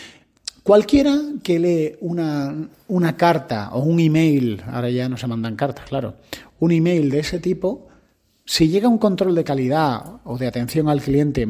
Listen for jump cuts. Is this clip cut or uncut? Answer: uncut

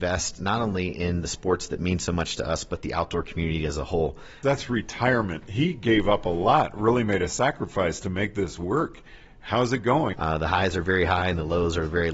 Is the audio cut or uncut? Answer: cut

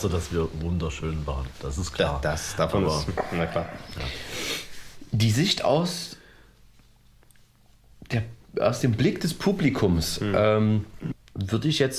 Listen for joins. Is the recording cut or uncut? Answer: uncut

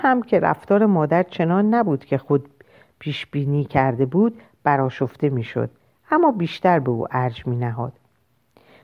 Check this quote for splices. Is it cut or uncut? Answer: uncut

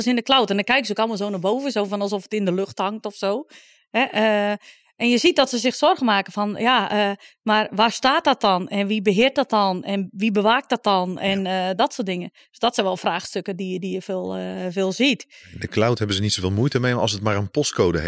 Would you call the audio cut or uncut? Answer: uncut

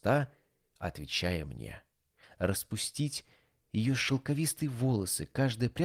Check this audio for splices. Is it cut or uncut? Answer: cut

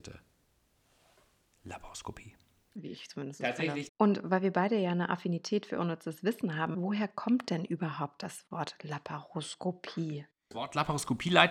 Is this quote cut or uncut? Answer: cut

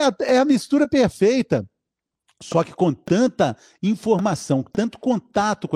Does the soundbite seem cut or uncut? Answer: uncut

